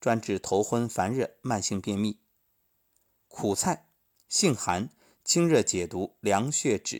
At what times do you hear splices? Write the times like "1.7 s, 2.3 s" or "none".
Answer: none

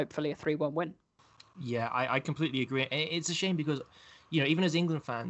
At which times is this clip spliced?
none

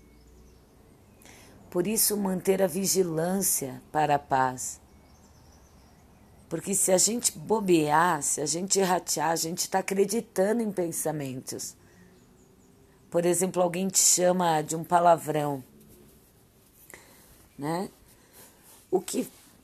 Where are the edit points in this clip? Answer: none

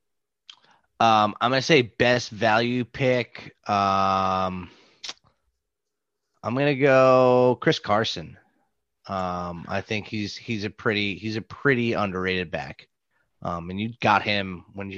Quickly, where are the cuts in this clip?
none

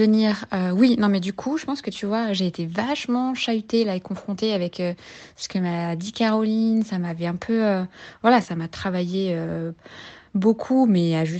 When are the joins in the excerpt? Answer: 8.4 s

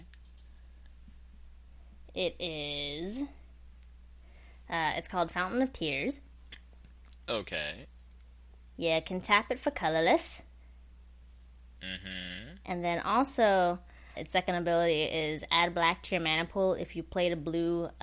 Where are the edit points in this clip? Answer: 14.1 s

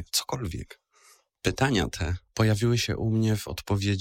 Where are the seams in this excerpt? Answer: 1.3 s

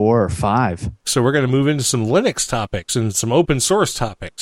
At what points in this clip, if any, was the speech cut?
1.0 s

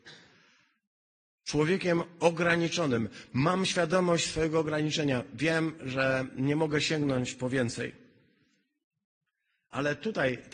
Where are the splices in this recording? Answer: none

